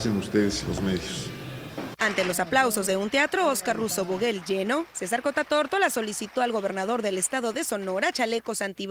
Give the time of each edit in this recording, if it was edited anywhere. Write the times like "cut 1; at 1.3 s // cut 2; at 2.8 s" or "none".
cut 1; at 2.0 s